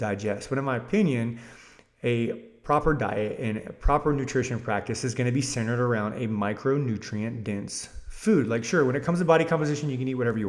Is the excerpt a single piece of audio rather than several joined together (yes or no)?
yes